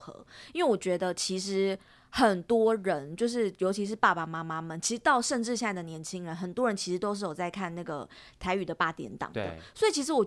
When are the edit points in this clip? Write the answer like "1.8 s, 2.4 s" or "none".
none